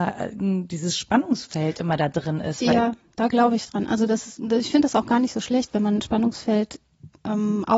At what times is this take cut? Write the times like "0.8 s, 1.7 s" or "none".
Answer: none